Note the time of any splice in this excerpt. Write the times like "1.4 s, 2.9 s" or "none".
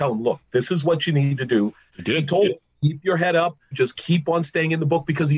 1.9 s, 3.7 s